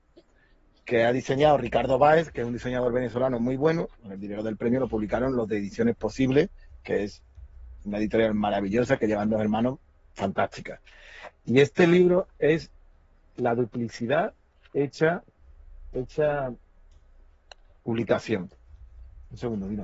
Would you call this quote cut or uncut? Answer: cut